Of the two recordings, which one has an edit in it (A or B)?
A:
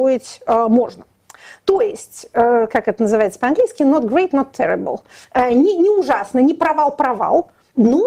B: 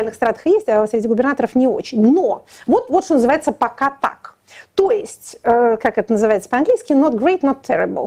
A